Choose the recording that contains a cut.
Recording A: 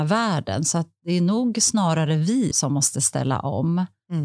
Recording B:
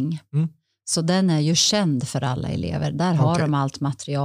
A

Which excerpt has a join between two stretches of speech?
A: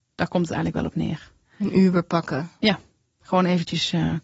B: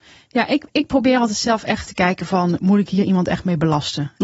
B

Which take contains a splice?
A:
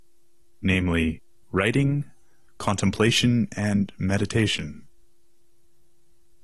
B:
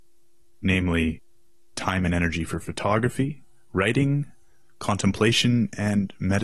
A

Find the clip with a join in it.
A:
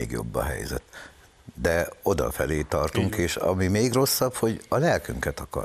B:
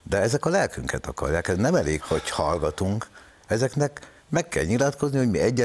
B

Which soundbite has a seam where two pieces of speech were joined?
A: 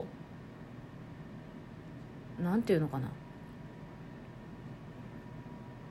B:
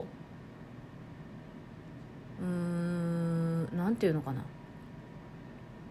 A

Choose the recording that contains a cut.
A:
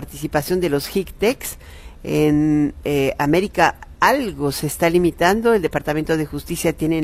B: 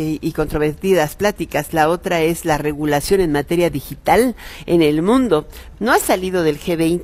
B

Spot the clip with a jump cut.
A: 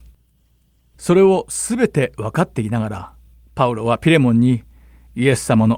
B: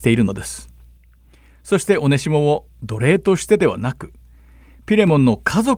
A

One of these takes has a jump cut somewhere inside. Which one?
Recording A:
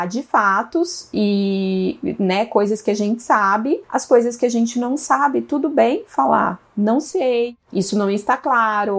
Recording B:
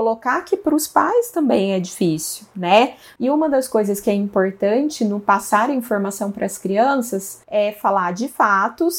B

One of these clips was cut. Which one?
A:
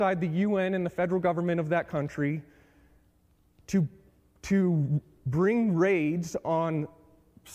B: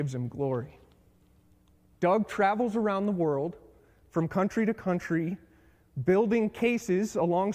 B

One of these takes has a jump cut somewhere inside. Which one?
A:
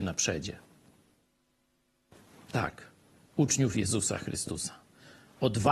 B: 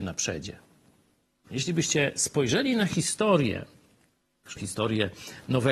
B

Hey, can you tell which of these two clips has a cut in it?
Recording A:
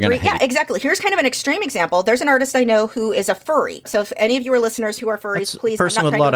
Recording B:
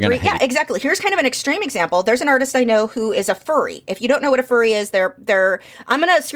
A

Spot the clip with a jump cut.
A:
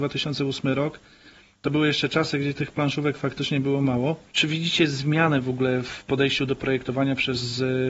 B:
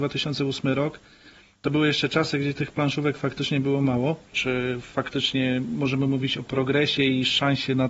B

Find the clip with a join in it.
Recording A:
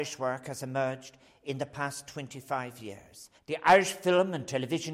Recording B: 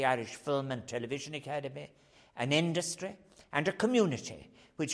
A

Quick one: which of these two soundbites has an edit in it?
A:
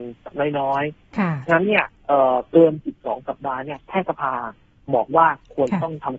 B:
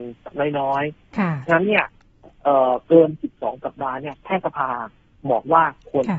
A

